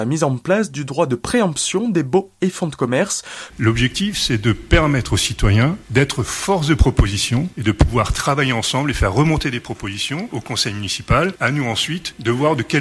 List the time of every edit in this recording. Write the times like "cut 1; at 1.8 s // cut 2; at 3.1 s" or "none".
cut 1; at 3.5 s